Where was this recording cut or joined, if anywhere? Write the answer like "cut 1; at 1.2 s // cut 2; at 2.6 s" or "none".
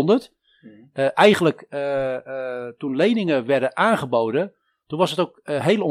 none